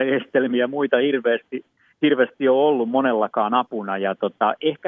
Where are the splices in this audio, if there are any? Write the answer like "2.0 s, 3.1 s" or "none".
none